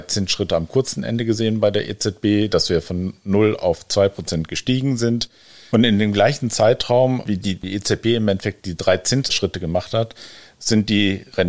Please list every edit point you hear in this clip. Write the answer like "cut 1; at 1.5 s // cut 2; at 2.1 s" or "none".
cut 1; at 5.7 s

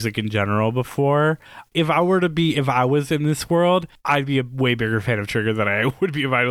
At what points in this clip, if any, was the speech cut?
cut 1; at 1.7 s

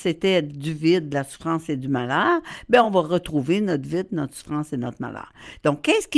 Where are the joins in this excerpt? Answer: none

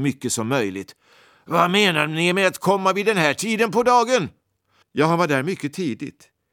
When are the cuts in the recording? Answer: cut 1; at 4.8 s

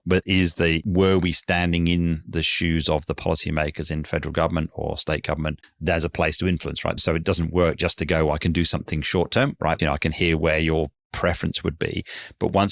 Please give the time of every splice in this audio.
cut 1; at 5.6 s // cut 2; at 7.0 s // cut 3; at 9.8 s

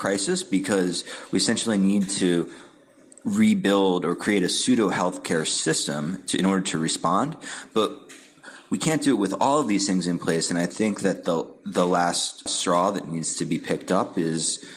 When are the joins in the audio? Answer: cut 1; at 12.5 s

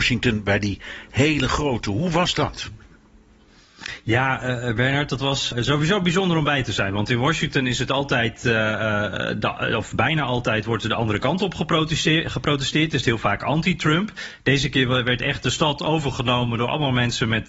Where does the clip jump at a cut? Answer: cut 1; at 5.5 s

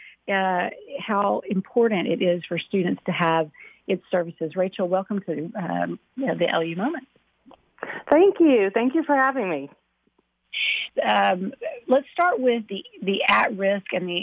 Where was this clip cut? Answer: cut 1; at 10.9 s // cut 2; at 12.7 s

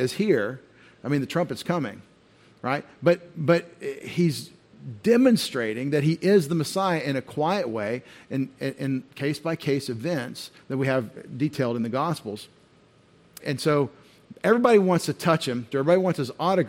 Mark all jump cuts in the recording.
cut 1; at 13.4 s // cut 2; at 15.7 s

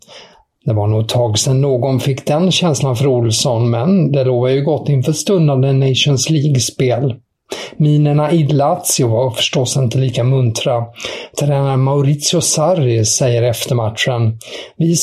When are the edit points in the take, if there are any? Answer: none

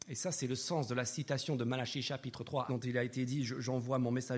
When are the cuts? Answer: cut 1; at 2.7 s

